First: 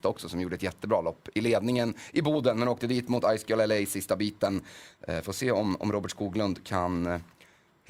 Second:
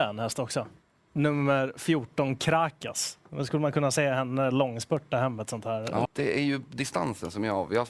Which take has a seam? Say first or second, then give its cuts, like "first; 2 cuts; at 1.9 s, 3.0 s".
second; 1 cut; at 6.1 s